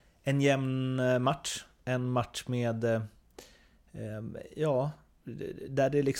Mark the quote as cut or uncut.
uncut